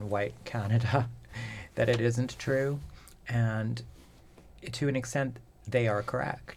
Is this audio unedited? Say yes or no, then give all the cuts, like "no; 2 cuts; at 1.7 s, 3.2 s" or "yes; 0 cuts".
yes; 0 cuts